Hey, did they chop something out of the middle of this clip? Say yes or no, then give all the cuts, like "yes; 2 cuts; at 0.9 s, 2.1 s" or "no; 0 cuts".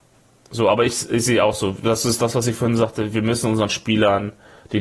no; 0 cuts